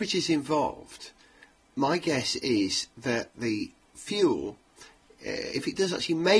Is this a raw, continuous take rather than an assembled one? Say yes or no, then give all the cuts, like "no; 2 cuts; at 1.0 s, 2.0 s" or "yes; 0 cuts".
yes; 0 cuts